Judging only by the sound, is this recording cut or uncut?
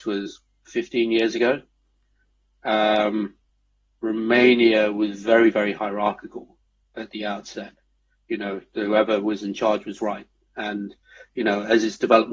uncut